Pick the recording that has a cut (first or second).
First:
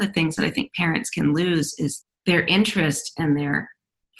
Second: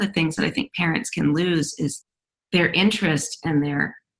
first